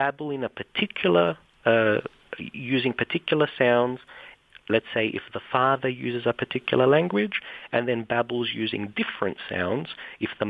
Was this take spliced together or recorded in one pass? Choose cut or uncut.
uncut